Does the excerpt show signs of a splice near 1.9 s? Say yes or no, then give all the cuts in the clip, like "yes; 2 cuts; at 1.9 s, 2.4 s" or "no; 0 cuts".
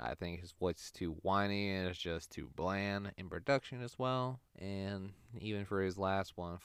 no; 1 cut; at 4.5 s